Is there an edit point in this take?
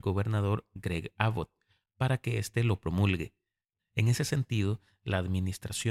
yes; 1 cut; at 3.8 s

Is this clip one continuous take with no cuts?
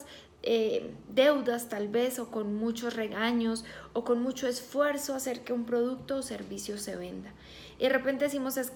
yes; 0 cuts

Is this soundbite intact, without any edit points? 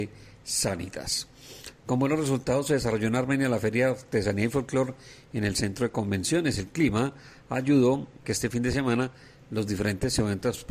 no; 1 cut; at 8.2 s

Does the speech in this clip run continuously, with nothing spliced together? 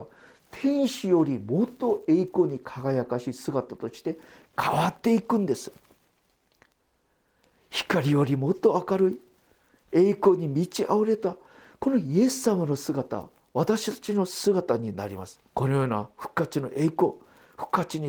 no; 1 cut; at 15.5 s

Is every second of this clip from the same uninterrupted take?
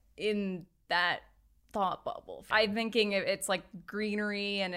no; 1 cut; at 2.5 s

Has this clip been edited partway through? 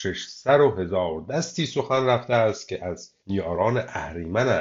yes; 1 cut; at 3.2 s

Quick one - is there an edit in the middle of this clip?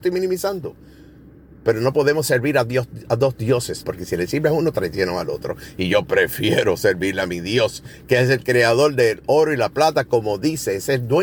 yes; 1 cut; at 3.8 s

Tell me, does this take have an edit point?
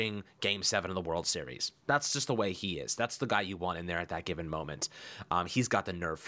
no; 0 cuts

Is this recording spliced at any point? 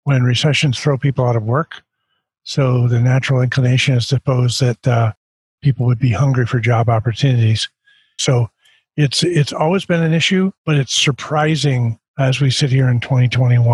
yes; 3 cuts; at 8.2 s, 10.6 s, 12.1 s

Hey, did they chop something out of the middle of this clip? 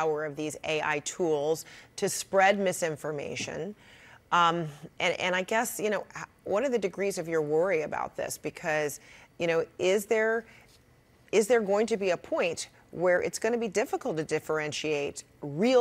no; 0 cuts

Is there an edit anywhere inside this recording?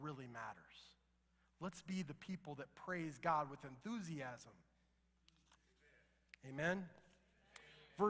no; 0 cuts

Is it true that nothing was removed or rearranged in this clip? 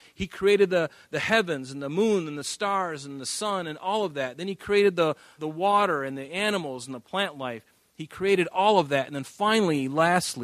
no; 1 cut; at 5.4 s

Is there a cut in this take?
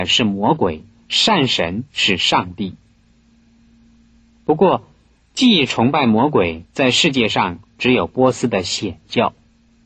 yes; 1 cut; at 6.7 s

